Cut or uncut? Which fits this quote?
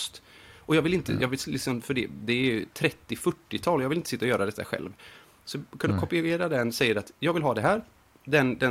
uncut